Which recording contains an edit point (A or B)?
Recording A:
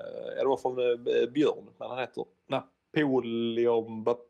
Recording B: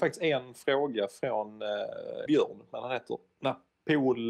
B